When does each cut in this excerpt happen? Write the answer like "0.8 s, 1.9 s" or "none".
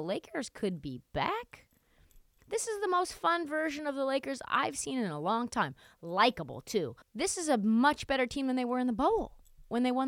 2.4 s, 7.0 s